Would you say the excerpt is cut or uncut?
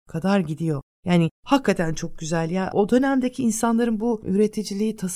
uncut